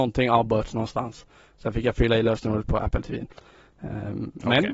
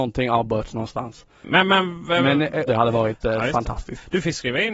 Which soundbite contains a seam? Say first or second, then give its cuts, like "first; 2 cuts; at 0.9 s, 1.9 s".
second; 2 cuts; at 1.4 s, 2.7 s